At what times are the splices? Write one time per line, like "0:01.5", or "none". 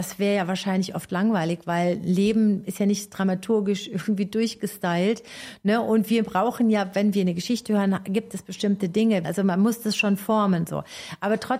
0:09.2